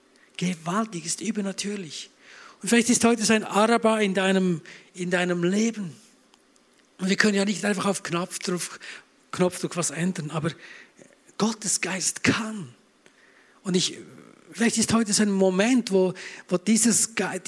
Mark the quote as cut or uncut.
uncut